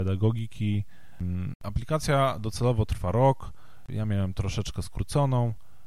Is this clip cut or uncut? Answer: cut